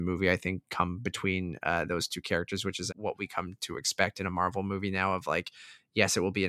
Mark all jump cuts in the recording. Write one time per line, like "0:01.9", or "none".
0:02.9